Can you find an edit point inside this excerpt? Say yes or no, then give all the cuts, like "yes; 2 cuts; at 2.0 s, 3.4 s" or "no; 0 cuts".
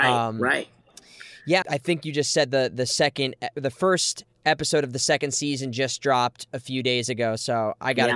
yes; 1 cut; at 1.6 s